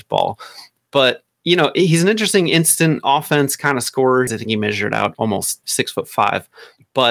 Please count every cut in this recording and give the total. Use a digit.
2